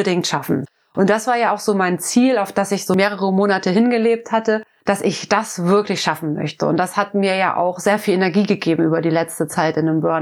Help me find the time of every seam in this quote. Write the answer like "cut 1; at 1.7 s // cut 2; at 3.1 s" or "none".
none